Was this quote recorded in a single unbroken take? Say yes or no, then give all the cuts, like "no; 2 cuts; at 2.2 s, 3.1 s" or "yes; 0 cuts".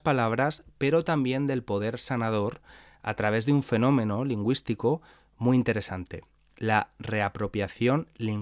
yes; 0 cuts